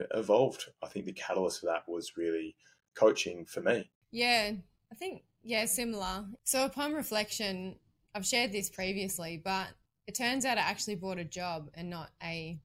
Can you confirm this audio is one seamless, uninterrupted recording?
yes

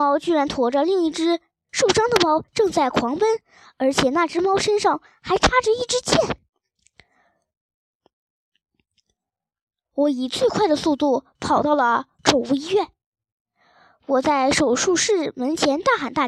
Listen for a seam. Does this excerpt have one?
no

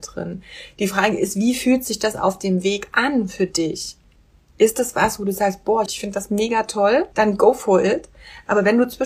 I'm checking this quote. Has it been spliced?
yes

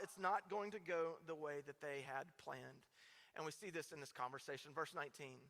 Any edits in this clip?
no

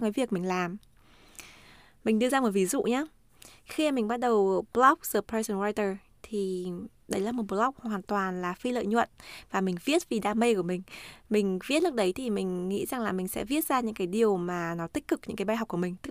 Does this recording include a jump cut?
no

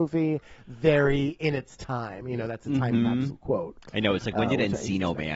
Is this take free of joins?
yes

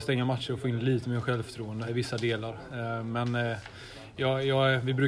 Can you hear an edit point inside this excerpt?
yes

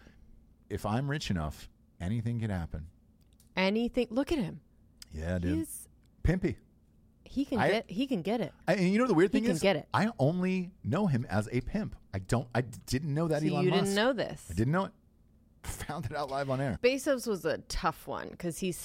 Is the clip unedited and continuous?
no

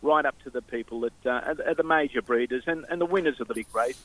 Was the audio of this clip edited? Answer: no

